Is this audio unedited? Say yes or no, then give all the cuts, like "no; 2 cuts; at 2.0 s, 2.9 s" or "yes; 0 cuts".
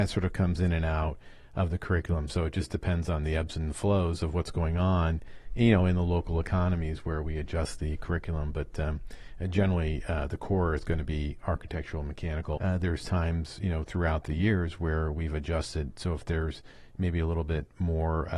no; 1 cut; at 12.6 s